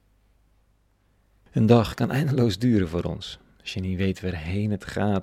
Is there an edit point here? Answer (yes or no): yes